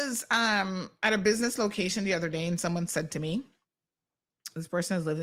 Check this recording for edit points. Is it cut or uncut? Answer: uncut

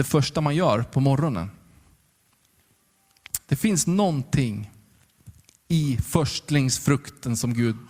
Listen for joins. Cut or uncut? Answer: uncut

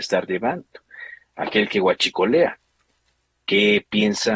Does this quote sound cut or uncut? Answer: uncut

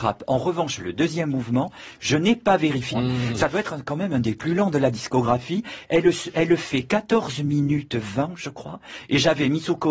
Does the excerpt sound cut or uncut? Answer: cut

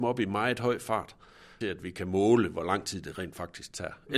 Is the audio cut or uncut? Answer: cut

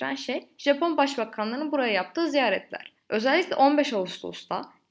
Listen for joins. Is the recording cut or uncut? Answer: uncut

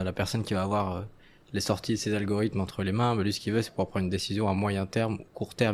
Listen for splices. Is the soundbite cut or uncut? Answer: uncut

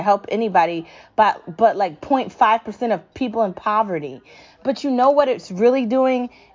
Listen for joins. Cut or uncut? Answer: uncut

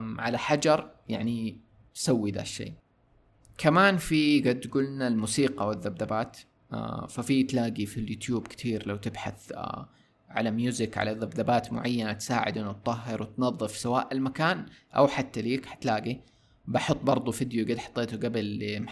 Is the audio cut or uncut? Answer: uncut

